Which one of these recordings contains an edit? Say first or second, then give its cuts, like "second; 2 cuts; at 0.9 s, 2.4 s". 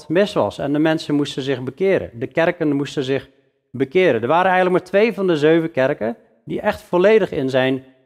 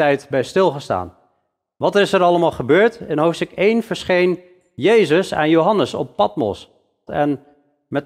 second; 1 cut; at 7.1 s